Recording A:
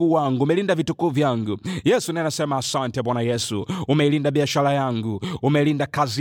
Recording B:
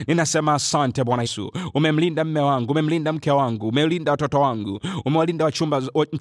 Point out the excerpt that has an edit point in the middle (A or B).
B